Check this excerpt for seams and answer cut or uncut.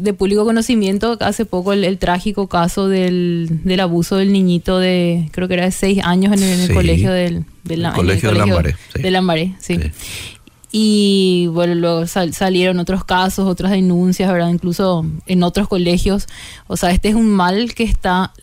uncut